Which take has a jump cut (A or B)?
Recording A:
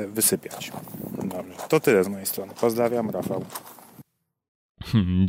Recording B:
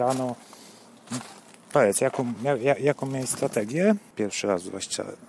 B